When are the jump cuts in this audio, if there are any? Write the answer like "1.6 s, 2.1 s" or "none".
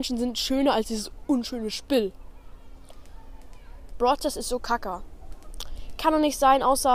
3.9 s